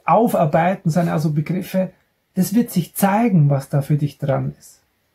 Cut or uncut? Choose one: uncut